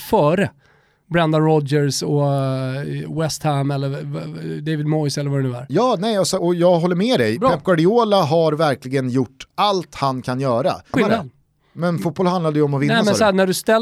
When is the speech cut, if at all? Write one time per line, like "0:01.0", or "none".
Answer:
0:06.4
0:10.9